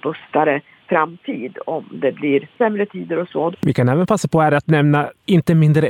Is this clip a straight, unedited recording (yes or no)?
no